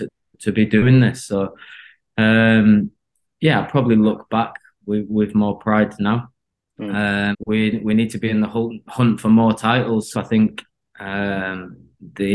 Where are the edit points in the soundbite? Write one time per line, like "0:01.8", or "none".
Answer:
0:07.3
0:10.1